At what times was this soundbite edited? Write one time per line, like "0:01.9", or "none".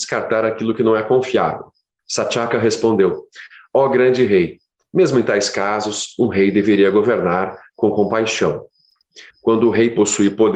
0:02.0
0:09.3